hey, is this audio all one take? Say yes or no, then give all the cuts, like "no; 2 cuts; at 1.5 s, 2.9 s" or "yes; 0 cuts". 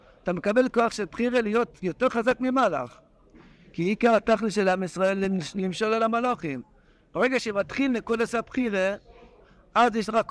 yes; 0 cuts